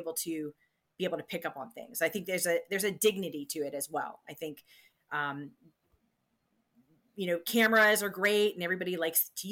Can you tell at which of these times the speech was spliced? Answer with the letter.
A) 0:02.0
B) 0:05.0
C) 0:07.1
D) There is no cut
D